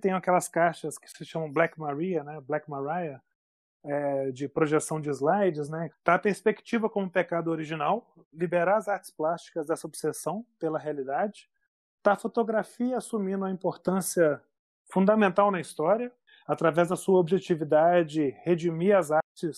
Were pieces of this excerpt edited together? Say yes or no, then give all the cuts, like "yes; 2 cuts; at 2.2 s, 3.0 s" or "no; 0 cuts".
yes; 1 cut; at 5.9 s